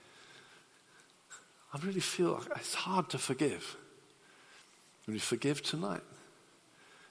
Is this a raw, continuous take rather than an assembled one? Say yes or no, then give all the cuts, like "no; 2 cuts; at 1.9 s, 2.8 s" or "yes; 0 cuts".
yes; 0 cuts